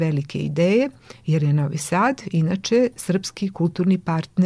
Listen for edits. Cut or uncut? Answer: uncut